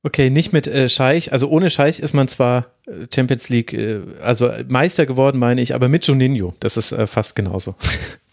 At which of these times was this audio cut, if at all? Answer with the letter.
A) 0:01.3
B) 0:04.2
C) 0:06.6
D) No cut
D